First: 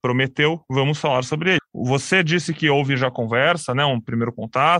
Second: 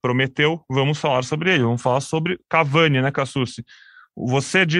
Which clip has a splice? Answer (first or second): first